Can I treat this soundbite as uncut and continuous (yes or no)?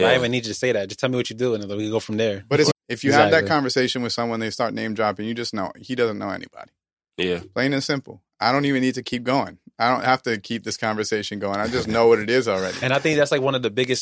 no